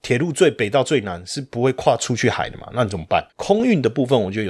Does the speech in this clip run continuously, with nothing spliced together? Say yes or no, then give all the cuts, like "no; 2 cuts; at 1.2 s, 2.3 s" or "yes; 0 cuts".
no; 1 cut; at 3.3 s